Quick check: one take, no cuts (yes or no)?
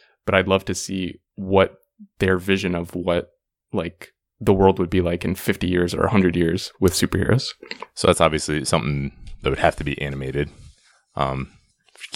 yes